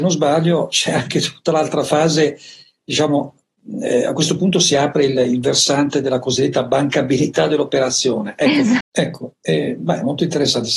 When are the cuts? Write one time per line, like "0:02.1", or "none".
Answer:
0:08.8